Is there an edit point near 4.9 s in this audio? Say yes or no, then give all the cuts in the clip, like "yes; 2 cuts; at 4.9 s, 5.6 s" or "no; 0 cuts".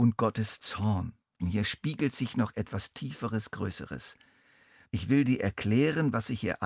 yes; 2 cuts; at 1.4 s, 4.9 s